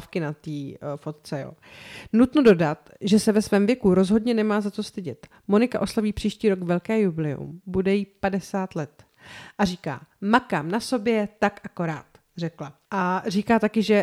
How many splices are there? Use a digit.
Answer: 0